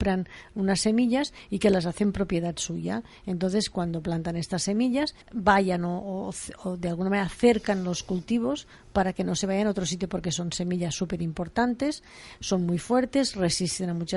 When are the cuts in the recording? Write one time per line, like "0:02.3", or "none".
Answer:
0:05.2